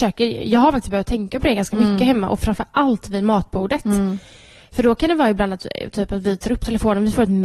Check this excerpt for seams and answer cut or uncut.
uncut